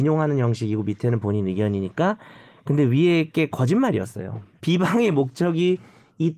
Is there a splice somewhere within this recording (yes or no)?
yes